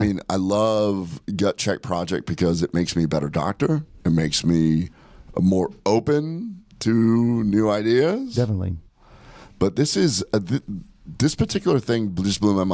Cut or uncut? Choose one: uncut